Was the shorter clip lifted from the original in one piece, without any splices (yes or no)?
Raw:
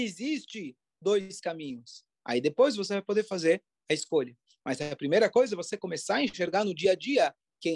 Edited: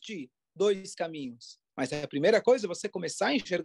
no